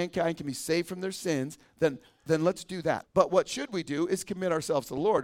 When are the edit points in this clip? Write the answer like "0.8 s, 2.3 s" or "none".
3.0 s